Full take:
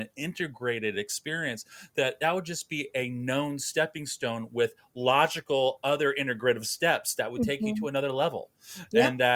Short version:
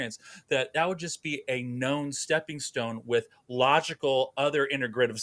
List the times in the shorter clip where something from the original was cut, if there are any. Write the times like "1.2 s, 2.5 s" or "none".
none